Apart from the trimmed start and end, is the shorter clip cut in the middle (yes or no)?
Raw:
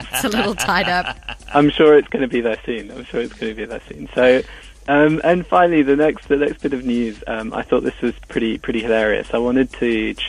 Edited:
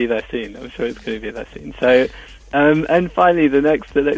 no